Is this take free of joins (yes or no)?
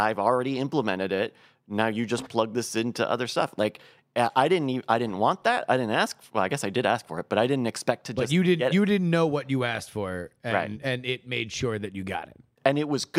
yes